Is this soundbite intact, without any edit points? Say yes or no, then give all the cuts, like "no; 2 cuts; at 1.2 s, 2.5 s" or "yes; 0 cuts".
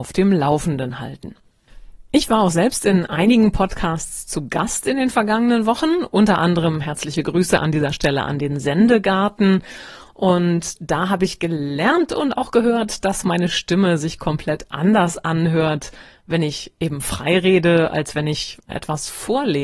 no; 1 cut; at 18.7 s